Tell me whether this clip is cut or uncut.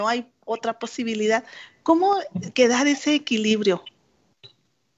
uncut